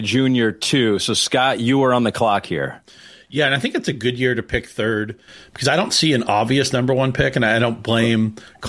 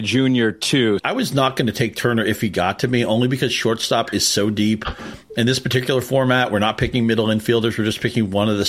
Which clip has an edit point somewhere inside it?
second; 1 cut; at 1.0 s

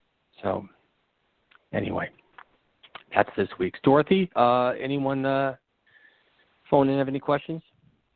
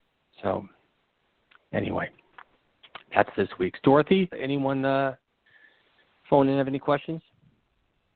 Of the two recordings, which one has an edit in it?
second; 1 cut; at 4.3 s

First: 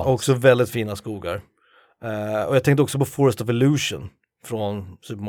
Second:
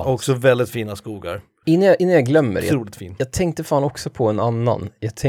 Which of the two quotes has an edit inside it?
second; 1 cut; at 1.6 s

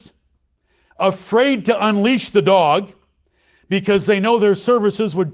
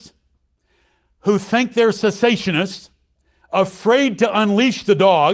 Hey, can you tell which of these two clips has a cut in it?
first; 1 cut; at 0.9 s

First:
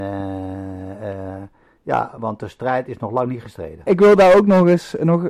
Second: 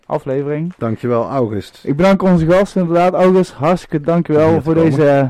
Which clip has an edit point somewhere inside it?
first; 2 cuts; at 2.2 s, 3.9 s

